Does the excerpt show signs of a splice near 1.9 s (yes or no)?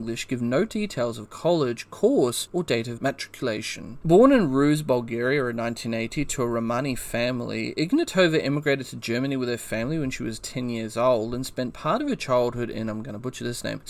no